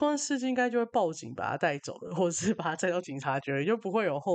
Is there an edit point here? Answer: no; 0 cuts

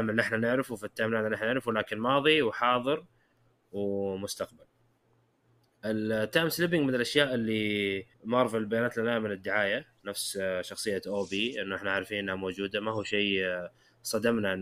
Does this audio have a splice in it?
yes; 1 cut; at 8.1 s

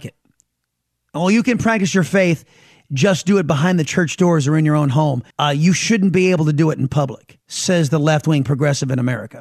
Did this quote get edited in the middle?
yes; 2 cuts; at 5.3 s, 7.4 s

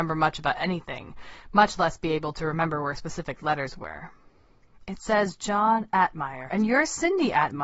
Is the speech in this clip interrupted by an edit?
yes; 1 cut; at 6.5 s

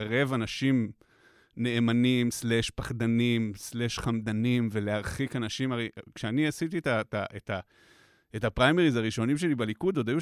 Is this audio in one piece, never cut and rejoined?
yes; 0 cuts

